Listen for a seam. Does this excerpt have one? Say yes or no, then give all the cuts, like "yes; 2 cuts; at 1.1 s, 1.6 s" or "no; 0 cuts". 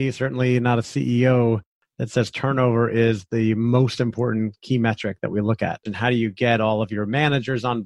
yes; 1 cut; at 5.9 s